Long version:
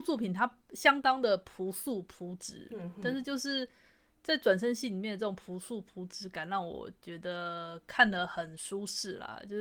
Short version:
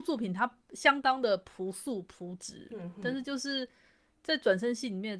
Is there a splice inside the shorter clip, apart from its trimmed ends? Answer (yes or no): no